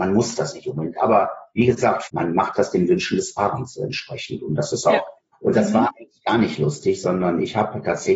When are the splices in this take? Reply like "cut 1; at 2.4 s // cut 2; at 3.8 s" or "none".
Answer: cut 1; at 2.0 s // cut 2; at 5.3 s